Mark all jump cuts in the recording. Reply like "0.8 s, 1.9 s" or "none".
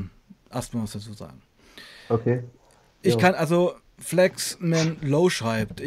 none